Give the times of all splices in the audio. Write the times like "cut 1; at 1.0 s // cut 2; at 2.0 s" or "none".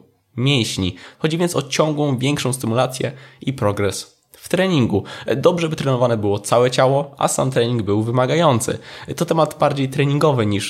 cut 1; at 1.1 s